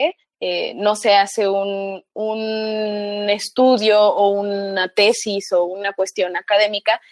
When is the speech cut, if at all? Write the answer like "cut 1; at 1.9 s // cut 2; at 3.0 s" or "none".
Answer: none